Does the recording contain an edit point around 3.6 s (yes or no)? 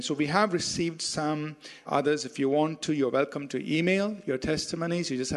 no